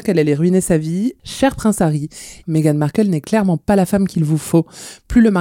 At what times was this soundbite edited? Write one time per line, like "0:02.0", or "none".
0:01.2
0:02.4